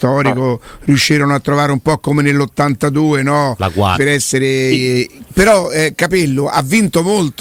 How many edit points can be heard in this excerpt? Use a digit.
2